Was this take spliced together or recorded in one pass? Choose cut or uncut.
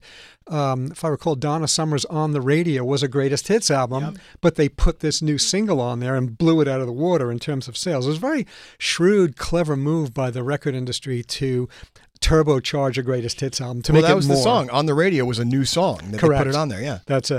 uncut